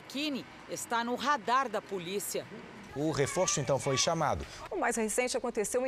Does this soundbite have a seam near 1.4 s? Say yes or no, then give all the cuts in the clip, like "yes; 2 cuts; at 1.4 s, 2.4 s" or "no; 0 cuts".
no; 2 cuts; at 2.9 s, 4.7 s